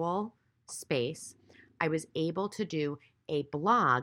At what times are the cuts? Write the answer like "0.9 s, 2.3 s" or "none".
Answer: none